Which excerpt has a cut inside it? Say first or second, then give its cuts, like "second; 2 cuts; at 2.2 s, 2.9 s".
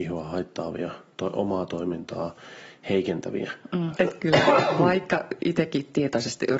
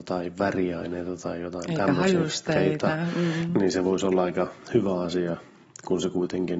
first; 1 cut; at 4.0 s